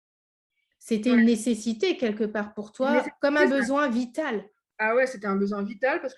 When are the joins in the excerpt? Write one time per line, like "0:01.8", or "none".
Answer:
none